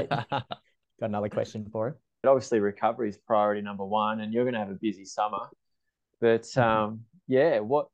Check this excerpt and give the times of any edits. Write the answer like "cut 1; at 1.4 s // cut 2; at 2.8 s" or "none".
cut 1; at 2.2 s